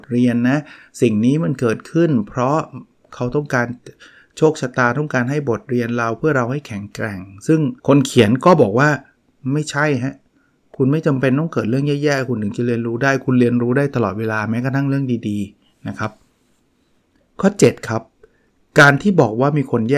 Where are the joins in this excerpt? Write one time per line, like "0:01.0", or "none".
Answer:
0:07.8